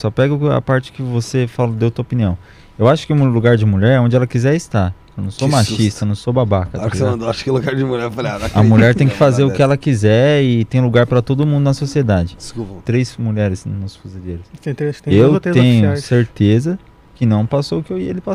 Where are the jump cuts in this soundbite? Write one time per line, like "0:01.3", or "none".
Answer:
0:12.8